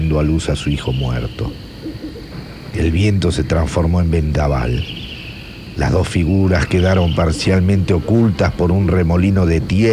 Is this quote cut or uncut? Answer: uncut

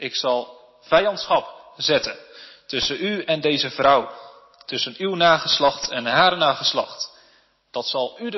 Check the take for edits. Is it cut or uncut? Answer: uncut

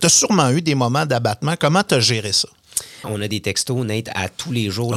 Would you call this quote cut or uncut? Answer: cut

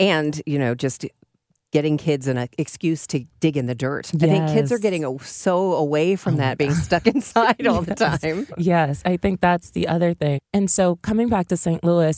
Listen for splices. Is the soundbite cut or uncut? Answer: cut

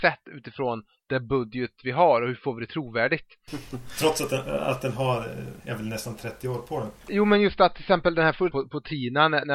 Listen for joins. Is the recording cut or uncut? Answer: cut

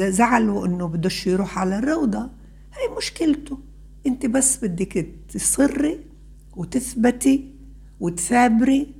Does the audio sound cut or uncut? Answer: uncut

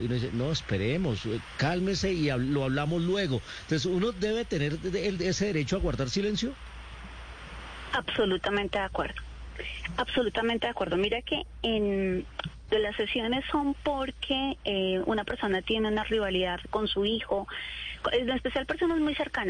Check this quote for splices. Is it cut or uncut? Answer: uncut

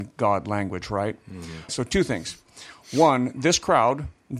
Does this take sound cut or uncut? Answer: cut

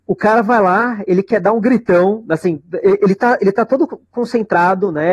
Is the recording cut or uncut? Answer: uncut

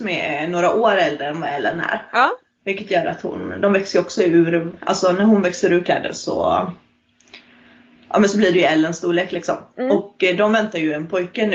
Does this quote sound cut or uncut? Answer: uncut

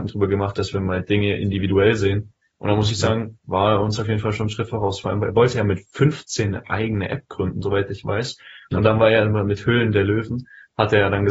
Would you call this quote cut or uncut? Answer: uncut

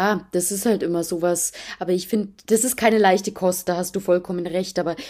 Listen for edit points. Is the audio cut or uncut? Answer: uncut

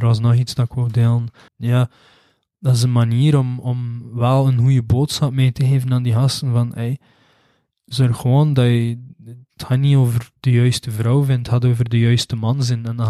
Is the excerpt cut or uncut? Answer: cut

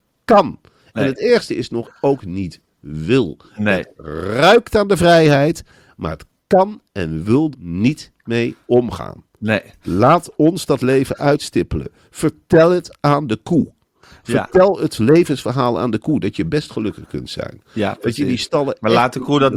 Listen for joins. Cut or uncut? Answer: cut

